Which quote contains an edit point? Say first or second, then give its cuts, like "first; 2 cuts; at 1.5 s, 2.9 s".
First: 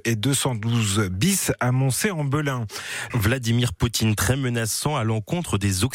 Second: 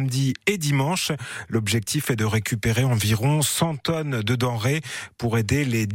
first; 1 cut; at 3.1 s